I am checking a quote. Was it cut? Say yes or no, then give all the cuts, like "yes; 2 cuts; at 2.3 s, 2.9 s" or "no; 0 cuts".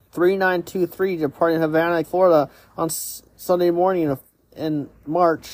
yes; 1 cut; at 2.0 s